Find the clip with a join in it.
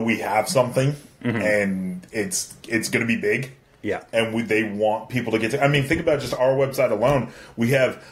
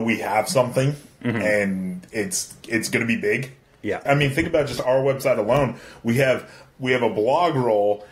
second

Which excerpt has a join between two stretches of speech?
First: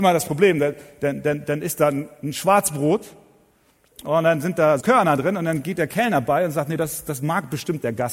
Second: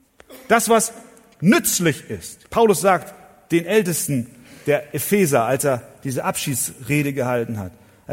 first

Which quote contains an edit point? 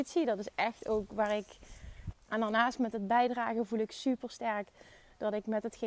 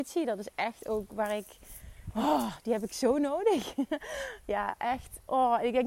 first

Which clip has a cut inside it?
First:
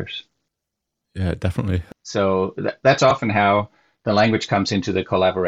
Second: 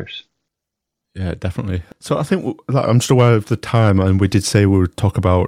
first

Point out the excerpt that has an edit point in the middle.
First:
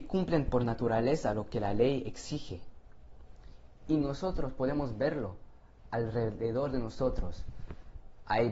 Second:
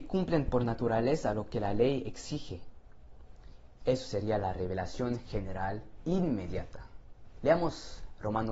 second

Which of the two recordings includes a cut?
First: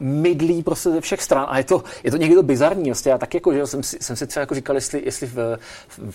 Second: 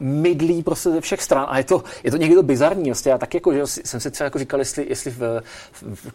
second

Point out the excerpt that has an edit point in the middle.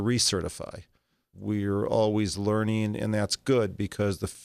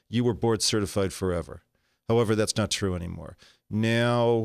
first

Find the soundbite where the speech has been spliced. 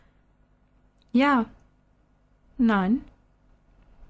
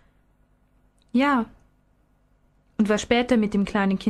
first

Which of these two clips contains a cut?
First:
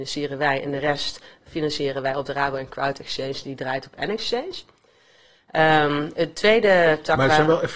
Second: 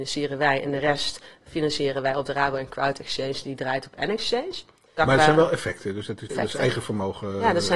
second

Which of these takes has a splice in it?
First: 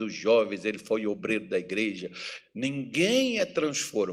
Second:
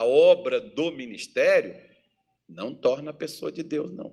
first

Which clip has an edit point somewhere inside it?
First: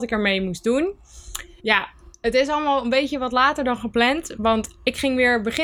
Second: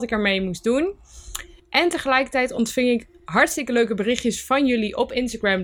first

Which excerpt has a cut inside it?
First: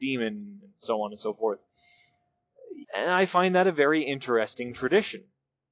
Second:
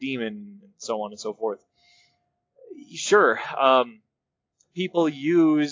first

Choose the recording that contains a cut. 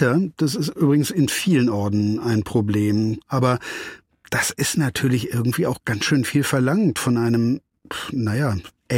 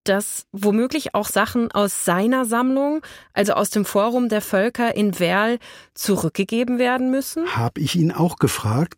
first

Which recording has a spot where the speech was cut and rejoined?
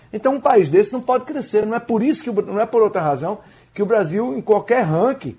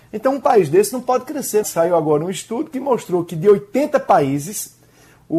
second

